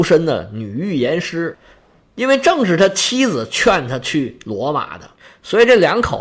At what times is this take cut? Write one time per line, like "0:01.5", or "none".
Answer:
none